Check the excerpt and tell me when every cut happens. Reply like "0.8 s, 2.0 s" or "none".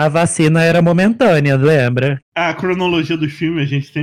2.2 s